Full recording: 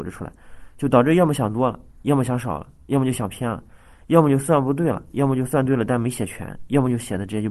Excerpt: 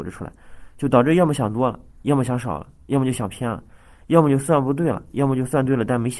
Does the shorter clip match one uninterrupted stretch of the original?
yes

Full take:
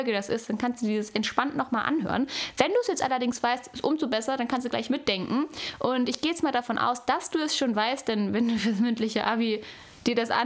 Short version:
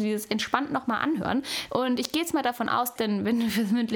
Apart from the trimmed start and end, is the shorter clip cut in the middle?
yes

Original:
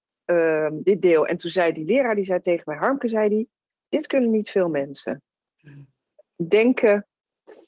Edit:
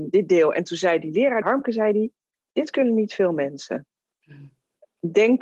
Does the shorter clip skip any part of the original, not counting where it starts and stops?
yes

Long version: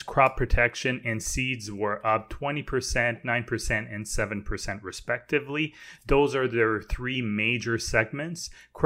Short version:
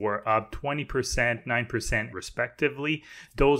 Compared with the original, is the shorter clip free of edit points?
no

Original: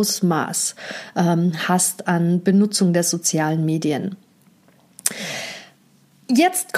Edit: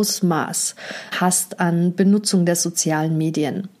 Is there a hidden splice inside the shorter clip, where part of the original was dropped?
yes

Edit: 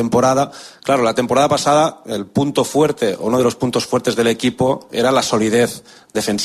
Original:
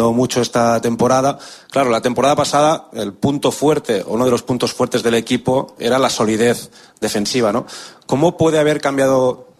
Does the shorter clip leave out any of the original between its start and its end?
no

